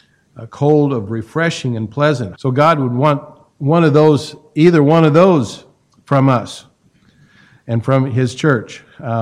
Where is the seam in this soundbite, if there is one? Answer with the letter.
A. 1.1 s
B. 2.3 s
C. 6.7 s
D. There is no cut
B